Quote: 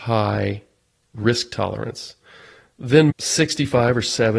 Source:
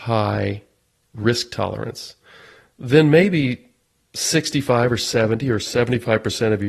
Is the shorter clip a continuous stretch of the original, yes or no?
no